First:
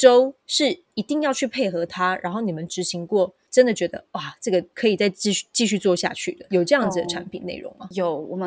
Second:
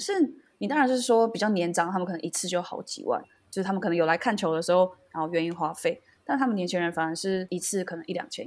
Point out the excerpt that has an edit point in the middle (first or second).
second